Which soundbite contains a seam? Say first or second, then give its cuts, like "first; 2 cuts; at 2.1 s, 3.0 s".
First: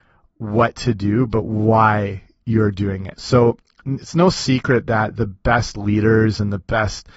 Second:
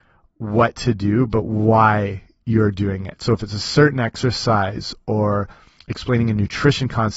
first; 1 cut; at 3.2 s